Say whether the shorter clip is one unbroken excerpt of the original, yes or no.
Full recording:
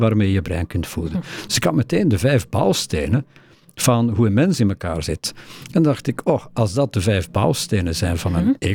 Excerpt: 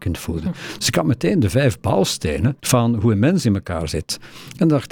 no